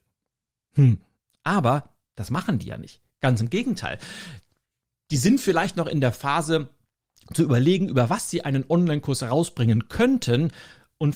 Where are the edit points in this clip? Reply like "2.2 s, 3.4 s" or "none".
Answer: none